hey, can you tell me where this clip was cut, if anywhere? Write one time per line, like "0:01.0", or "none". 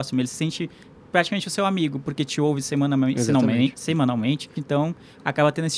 0:04.6